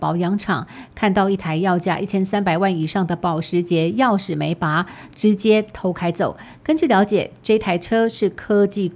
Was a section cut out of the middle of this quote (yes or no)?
no